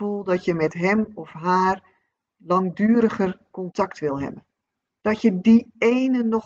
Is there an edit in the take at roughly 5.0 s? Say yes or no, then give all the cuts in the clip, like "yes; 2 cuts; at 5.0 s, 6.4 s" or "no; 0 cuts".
yes; 1 cut; at 5.0 s